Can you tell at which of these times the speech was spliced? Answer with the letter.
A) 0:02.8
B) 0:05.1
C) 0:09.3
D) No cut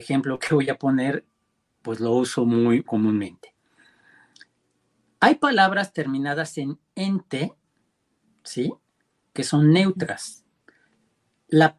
A